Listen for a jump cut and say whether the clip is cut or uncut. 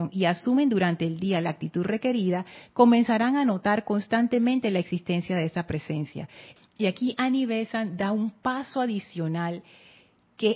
cut